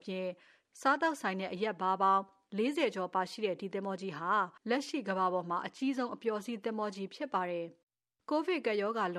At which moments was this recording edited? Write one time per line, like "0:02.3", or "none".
0:04.6